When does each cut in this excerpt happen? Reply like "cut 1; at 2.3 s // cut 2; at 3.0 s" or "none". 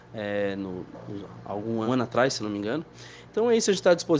cut 1; at 1.9 s // cut 2; at 3.3 s